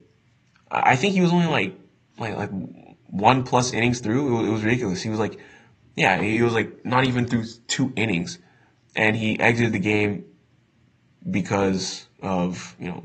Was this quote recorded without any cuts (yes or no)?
yes